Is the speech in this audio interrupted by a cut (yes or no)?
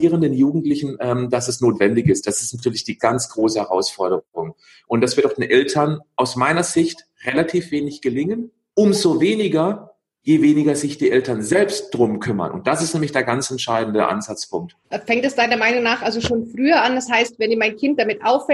yes